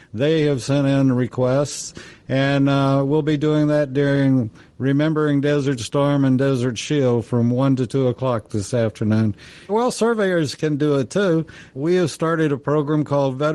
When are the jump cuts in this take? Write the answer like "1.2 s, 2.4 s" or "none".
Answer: 9.7 s, 11.7 s

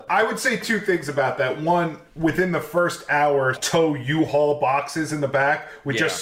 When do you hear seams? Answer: 3.5 s

